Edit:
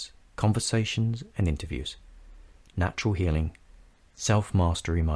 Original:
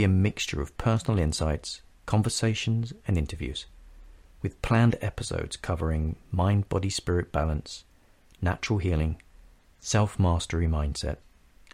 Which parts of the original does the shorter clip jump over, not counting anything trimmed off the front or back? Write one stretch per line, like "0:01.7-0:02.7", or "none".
0:04.3-0:08.3